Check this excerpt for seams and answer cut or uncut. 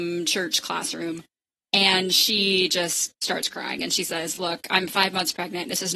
uncut